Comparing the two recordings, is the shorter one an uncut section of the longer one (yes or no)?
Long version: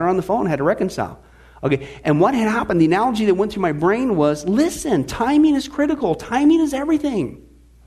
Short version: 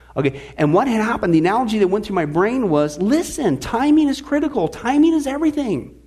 yes